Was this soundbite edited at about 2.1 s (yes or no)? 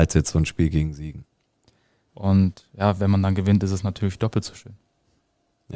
yes